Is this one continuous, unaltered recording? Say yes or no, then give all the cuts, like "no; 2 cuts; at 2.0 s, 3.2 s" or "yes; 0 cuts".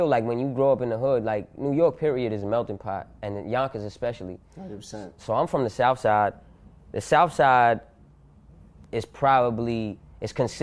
yes; 0 cuts